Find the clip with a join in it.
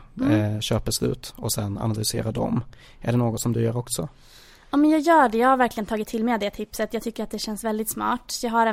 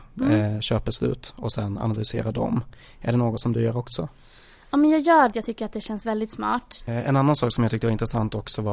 second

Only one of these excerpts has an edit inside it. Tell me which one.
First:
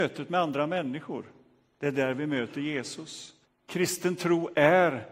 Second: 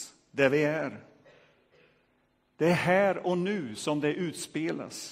first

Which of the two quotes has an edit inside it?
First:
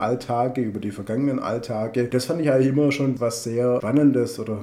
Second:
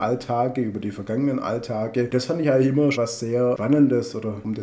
second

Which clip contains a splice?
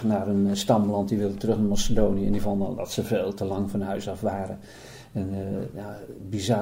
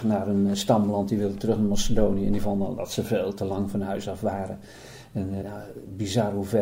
second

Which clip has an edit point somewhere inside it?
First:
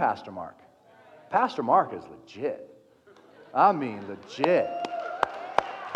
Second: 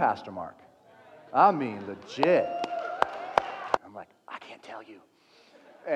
second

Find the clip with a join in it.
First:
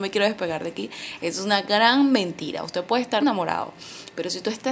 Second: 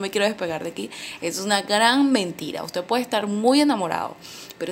first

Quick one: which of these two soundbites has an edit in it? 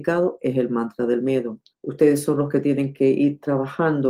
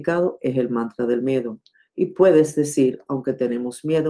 first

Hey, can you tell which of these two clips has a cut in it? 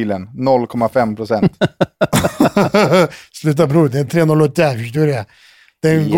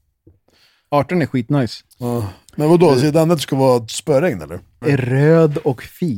second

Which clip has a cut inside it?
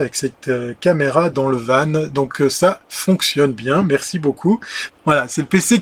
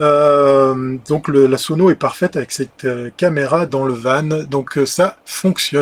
first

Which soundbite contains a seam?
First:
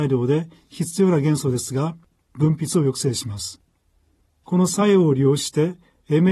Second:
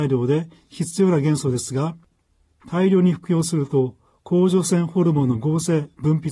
first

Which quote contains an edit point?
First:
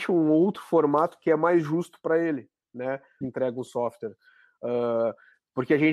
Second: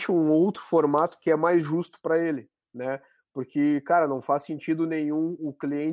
first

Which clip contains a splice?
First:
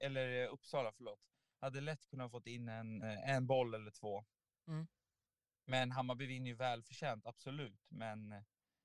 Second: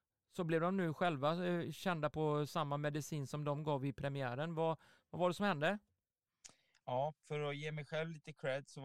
first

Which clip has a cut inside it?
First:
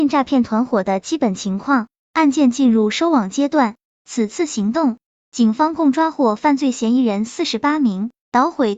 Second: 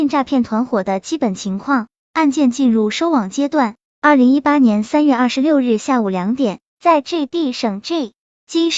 first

